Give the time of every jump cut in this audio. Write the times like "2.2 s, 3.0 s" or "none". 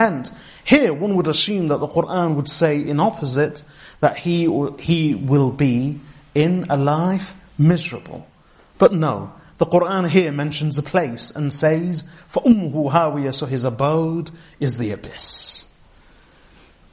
none

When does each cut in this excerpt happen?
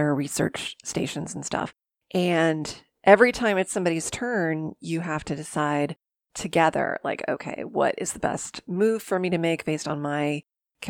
none

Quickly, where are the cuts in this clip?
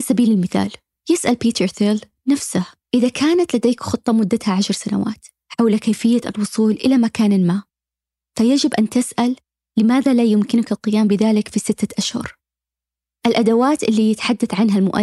none

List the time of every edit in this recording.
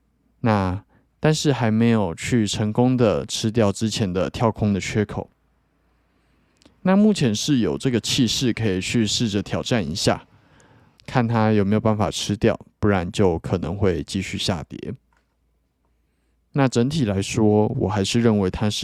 11.0 s

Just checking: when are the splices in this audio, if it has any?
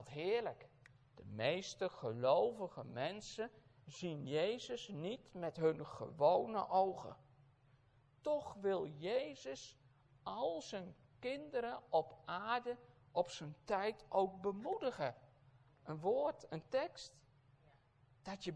1.0 s, 15.7 s

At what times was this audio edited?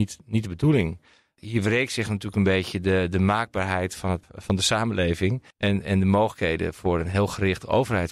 4.2 s, 5.5 s

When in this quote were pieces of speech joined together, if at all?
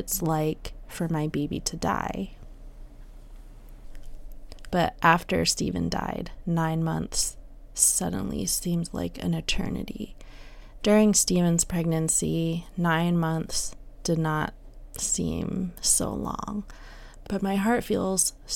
4.7 s, 10.8 s, 17.2 s

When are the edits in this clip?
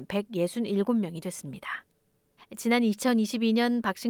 2.4 s

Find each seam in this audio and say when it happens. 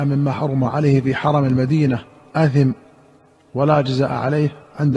none

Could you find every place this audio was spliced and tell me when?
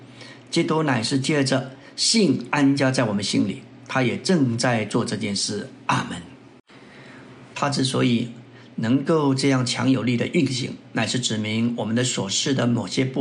7.5 s

